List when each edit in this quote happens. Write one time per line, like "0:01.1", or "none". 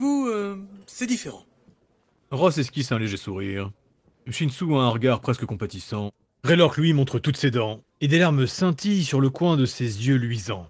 none